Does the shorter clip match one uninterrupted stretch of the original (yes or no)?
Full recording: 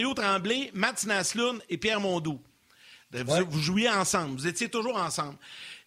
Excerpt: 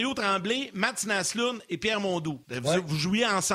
no